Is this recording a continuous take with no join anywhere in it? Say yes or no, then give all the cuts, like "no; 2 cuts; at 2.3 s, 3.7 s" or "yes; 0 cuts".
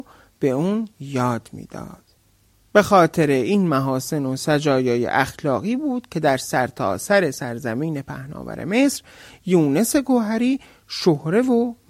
yes; 0 cuts